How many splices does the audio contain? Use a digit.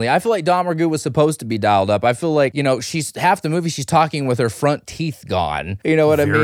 0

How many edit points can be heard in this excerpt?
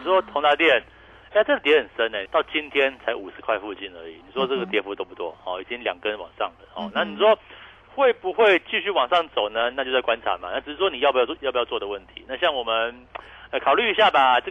2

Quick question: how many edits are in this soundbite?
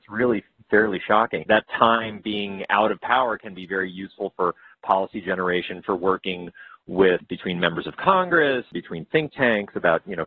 2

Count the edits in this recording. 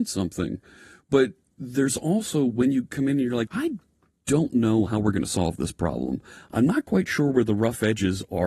1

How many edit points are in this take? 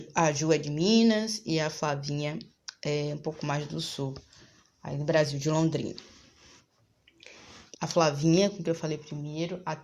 1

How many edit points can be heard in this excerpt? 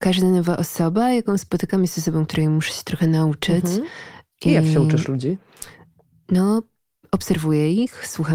0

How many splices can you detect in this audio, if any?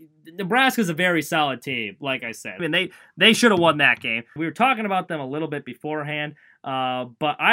2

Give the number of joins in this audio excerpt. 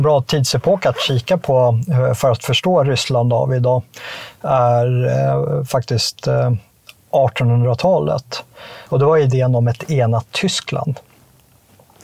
1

